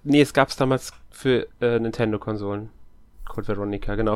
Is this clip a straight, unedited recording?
yes; 0 cuts

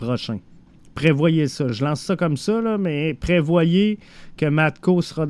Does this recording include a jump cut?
no; 0 cuts

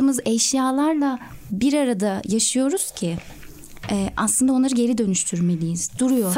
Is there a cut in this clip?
no; 0 cuts

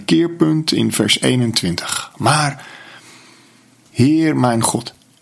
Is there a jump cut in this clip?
yes; 1 cut; at 3.9 s

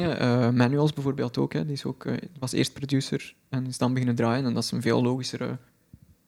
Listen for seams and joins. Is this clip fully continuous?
yes; 0 cuts

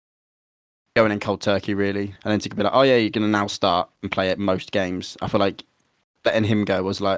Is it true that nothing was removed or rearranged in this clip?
no; 1 cut; at 2.2 s

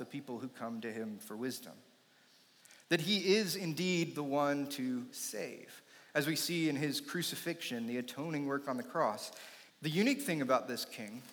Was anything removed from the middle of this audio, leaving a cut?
yes; 1 cut; at 9.7 s

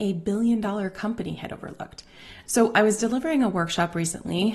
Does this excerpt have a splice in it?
yes; 1 cut; at 2.4 s

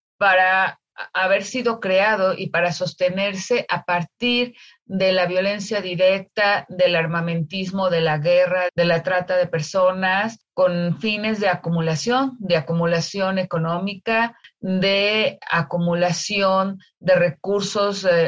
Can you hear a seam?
yes; 1 cut; at 8.7 s

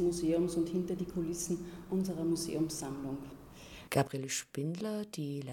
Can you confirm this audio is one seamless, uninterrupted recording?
no; 1 cut; at 3.9 s

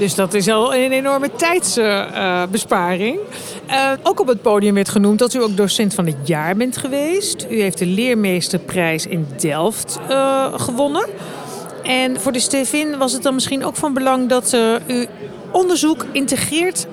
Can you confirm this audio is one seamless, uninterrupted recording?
no; 1 cut; at 4.0 s

